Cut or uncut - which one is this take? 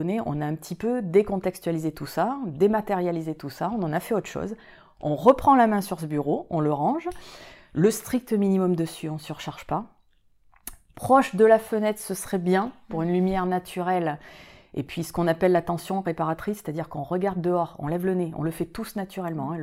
uncut